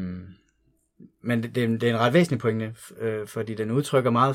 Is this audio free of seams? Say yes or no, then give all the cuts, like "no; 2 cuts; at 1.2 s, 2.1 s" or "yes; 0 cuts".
yes; 0 cuts